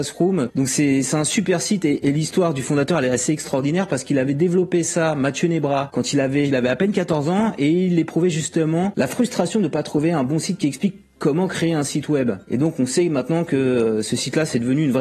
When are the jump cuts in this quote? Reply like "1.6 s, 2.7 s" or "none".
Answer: 6.4 s